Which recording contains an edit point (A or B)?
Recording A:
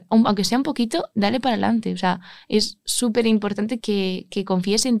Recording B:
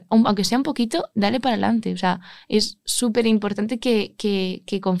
A